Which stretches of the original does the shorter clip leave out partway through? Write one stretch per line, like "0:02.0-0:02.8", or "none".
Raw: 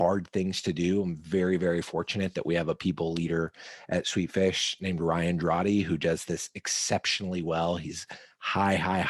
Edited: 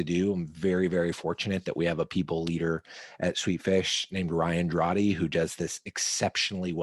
none